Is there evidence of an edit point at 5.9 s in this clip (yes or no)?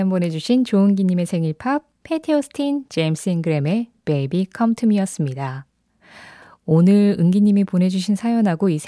no